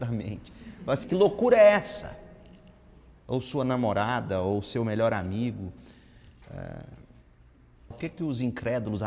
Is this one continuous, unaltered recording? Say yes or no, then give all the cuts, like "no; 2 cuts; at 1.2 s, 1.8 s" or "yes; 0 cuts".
no; 2 cuts; at 1.0 s, 7.9 s